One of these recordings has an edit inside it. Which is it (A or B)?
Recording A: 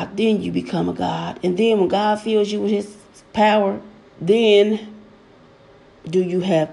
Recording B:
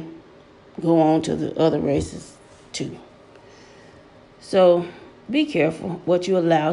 A